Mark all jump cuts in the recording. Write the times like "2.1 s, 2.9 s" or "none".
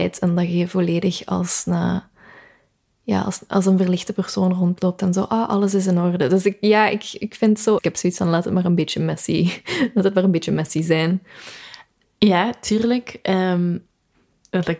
7.8 s